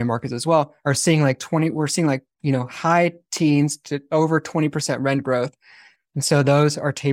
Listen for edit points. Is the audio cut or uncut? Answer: cut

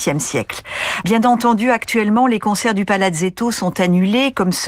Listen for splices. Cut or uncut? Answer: cut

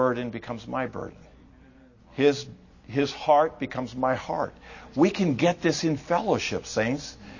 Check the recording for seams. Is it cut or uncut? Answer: uncut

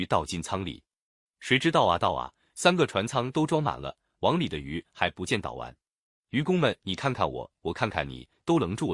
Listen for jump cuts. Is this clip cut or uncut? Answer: uncut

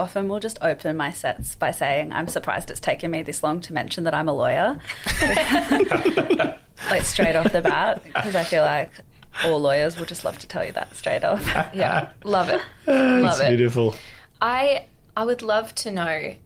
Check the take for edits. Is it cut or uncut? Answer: uncut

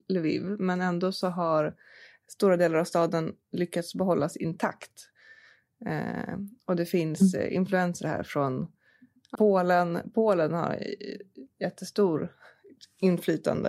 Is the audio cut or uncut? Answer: cut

